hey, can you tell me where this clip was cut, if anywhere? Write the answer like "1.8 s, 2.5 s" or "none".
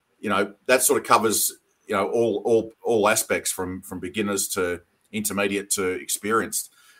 none